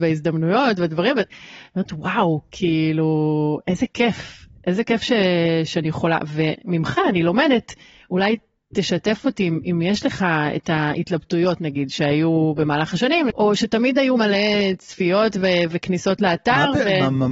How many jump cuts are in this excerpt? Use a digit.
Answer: 1